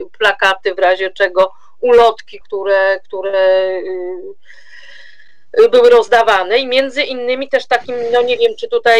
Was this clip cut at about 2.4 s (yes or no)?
yes